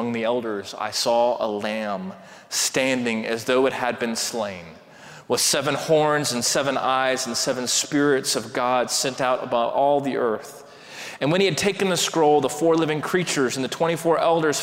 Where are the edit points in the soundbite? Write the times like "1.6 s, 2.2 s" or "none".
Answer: 11.2 s